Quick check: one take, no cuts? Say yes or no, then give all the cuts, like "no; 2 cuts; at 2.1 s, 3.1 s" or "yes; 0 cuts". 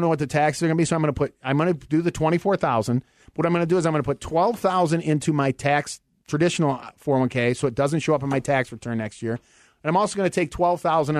yes; 0 cuts